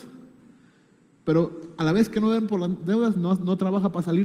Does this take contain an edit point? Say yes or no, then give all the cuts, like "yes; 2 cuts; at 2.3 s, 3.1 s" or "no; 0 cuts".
no; 0 cuts